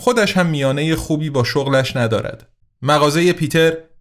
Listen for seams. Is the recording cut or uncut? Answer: cut